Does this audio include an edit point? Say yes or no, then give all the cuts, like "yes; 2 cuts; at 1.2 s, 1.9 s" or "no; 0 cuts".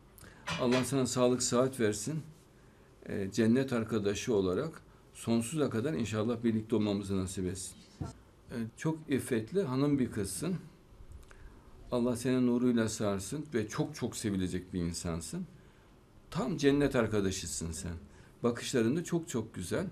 yes; 1 cut; at 8.7 s